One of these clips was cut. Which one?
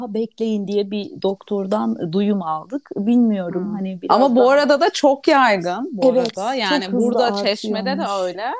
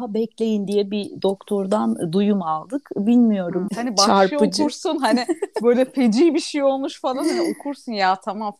second; 1 cut; at 3.7 s

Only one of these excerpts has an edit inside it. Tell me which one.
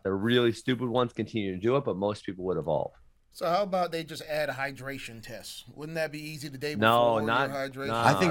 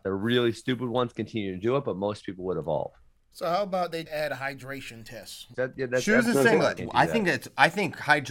second; 3 cuts; at 4.1 s, 5.5 s, 6.8 s

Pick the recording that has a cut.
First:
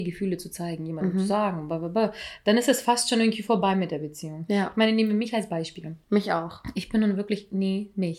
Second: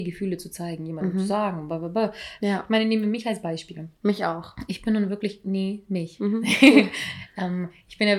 second; 1 cut; at 2.4 s

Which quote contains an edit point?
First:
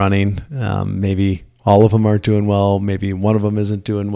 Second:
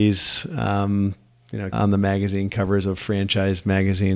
second; 1 cut; at 1.7 s

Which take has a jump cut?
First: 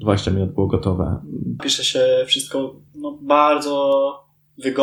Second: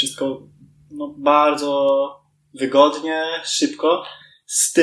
first; 2 cuts; at 1.6 s, 2.9 s

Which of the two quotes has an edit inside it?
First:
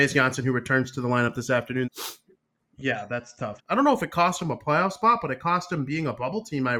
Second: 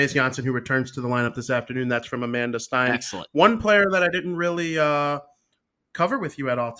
first; 2 cuts; at 1.8 s, 3.6 s

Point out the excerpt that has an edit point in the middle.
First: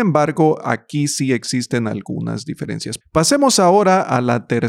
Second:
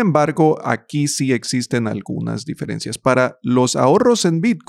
first; 1 cut; at 3.0 s

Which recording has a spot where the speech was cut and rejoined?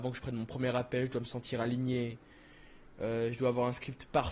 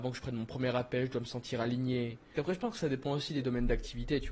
second; 1 cut; at 2.3 s

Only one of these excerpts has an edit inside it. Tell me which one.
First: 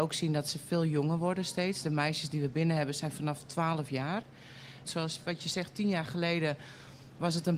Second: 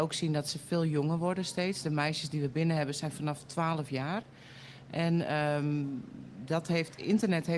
first; 1 cut; at 4.8 s

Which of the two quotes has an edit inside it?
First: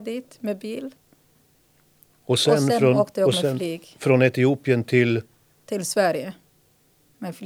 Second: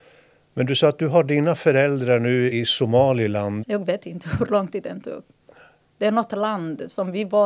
second; 3 cuts; at 2.5 s, 3.6 s, 5.9 s

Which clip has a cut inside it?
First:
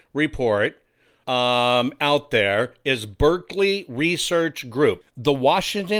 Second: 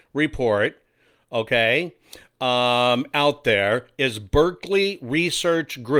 first; 2 cuts; at 1.2 s, 5.0 s

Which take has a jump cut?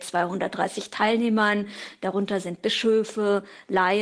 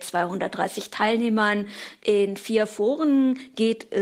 second; 1 cut; at 2.0 s

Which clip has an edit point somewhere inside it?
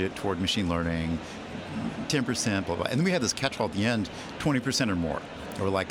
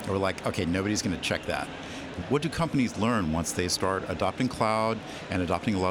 second; 1 cut; at 2.2 s

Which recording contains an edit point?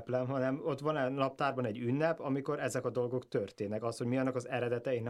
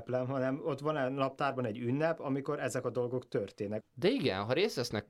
second; 1 cut; at 3.8 s

